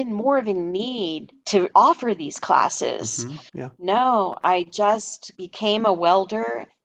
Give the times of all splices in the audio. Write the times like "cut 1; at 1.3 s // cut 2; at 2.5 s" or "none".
cut 1; at 3.5 s // cut 2; at 5.3 s